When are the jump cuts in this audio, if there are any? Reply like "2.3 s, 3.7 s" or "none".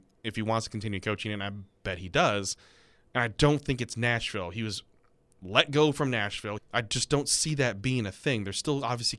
6.6 s